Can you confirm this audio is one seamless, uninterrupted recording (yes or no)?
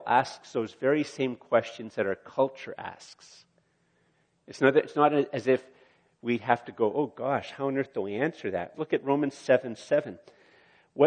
no